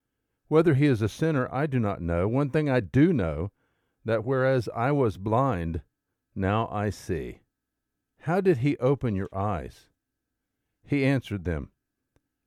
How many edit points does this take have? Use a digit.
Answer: 1